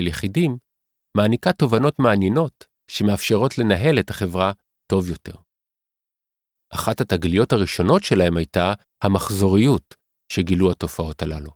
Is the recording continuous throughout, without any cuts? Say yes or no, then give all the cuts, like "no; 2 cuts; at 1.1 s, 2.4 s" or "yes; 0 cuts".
no; 1 cut; at 6.6 s